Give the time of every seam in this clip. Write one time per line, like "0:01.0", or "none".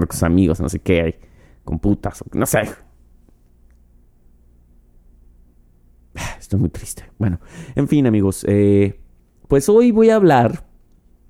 none